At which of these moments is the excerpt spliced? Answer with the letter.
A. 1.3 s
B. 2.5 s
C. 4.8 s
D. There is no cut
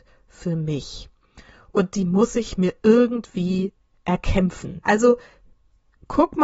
C